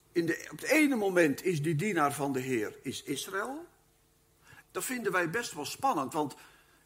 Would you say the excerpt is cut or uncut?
cut